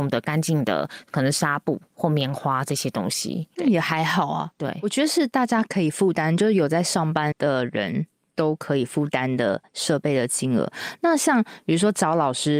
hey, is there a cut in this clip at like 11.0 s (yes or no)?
no